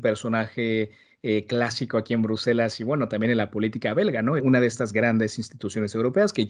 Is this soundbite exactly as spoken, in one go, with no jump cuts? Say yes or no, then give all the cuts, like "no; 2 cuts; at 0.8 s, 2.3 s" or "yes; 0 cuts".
no; 1 cut; at 4.4 s